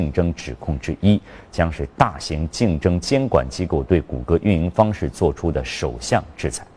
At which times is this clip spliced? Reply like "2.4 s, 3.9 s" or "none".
none